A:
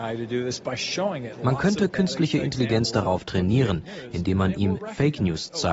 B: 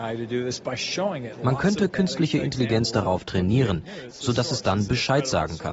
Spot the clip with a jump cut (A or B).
B